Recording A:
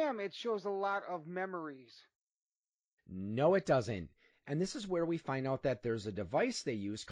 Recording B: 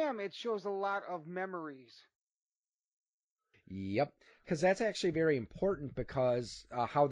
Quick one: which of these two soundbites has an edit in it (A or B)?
A